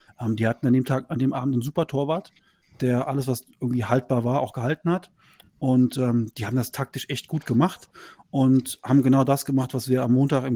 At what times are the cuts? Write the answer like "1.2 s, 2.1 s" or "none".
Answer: none